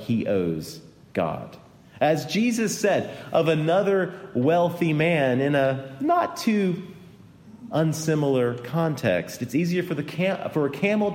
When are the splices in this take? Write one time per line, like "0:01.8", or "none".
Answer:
none